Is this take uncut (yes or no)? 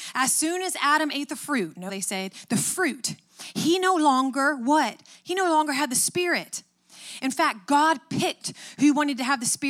no